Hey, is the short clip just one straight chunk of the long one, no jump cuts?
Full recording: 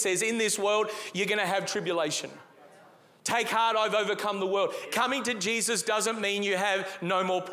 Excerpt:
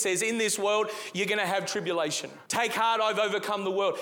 no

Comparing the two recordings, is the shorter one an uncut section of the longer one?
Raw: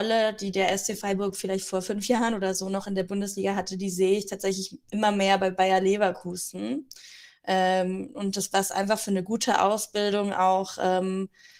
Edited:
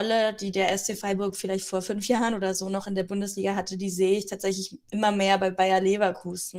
yes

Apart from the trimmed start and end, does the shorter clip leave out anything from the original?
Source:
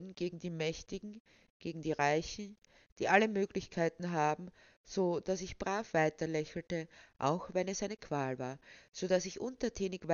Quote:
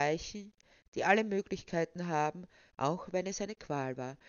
yes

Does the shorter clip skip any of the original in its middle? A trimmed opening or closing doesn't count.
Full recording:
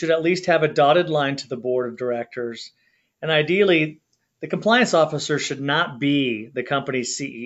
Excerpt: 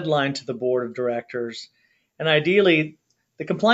no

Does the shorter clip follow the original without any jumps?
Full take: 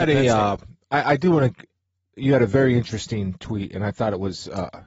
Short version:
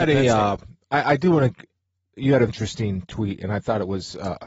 no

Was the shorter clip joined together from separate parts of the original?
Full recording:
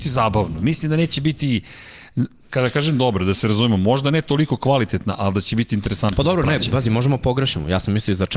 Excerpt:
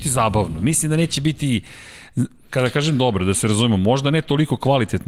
no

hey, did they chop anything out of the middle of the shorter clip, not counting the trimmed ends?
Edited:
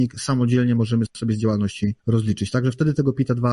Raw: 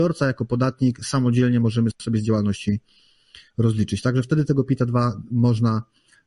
yes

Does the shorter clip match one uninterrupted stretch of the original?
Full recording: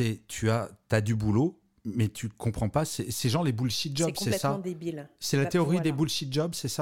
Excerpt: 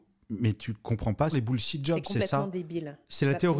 no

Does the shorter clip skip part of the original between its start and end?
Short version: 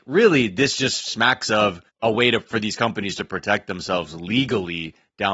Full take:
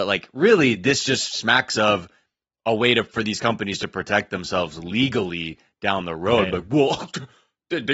yes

